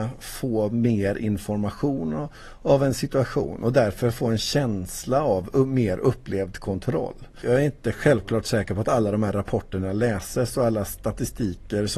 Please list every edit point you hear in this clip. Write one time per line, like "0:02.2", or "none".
0:07.4